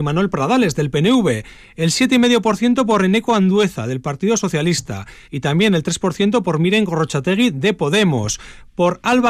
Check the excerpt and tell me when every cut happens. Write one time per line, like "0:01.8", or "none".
0:05.2